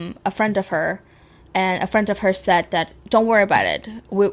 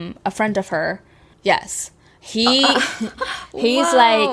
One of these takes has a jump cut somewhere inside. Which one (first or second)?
second